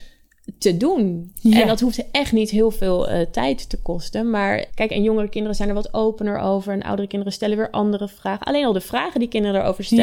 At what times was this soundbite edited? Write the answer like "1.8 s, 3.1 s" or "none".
4.7 s